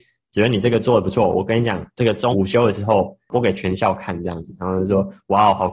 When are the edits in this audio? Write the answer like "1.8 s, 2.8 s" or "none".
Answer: 2.3 s